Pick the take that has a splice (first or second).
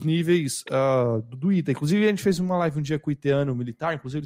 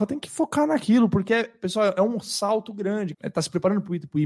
second